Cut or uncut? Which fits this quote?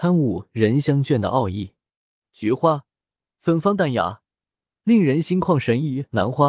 cut